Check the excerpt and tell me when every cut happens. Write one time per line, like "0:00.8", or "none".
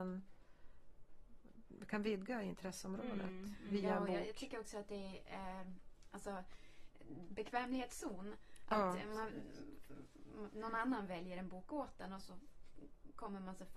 0:07.3